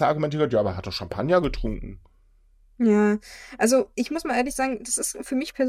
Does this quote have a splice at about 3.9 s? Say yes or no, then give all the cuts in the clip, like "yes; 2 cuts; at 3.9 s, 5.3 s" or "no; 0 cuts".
yes; 1 cut; at 3.9 s